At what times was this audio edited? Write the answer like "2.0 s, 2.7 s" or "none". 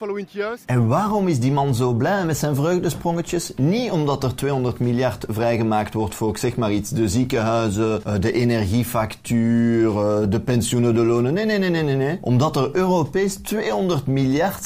none